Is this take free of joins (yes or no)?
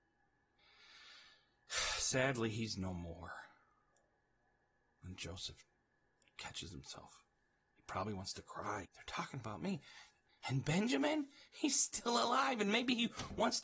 no